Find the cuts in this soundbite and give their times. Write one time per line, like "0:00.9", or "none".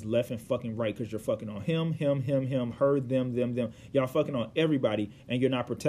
none